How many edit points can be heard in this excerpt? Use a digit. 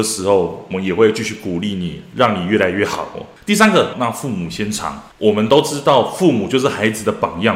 1